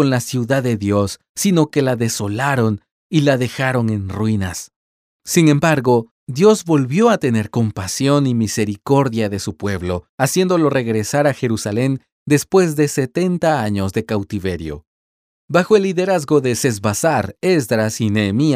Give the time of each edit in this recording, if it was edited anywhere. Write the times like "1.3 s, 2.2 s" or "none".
none